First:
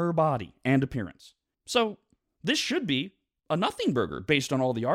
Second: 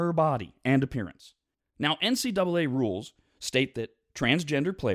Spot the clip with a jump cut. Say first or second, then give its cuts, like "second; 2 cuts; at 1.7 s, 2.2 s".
second; 1 cut; at 1.6 s